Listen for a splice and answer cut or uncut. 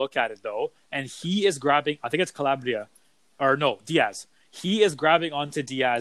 uncut